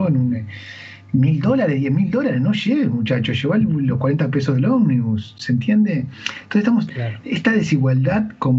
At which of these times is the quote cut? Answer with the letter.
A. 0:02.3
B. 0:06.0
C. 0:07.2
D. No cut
D